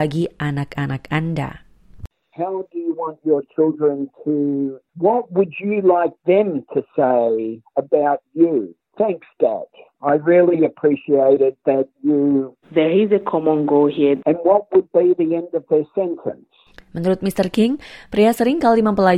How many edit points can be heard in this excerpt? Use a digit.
3